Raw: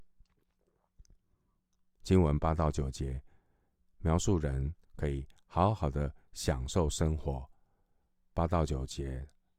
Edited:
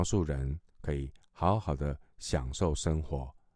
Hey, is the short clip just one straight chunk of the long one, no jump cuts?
yes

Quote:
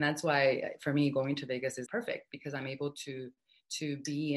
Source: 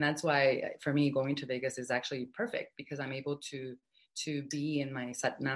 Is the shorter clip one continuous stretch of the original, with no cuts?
no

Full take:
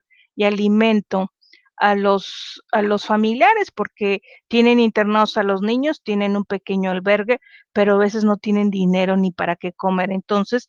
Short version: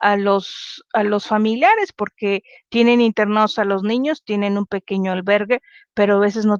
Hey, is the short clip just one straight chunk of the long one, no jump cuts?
yes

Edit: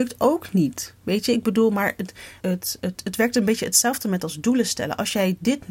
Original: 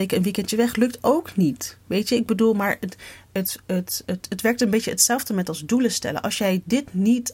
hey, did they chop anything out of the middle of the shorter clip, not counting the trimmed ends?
yes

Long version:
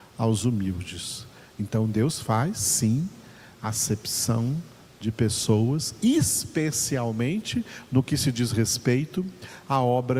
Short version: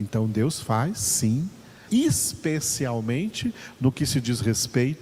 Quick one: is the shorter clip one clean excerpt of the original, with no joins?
no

